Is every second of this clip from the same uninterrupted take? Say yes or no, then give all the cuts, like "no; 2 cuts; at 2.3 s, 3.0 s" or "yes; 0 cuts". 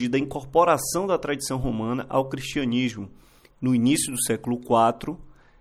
no; 1 cut; at 3.5 s